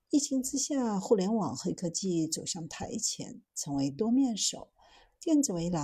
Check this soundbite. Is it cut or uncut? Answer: uncut